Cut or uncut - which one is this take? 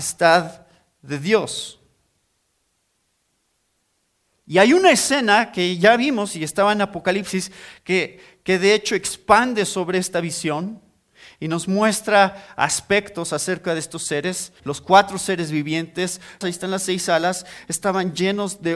cut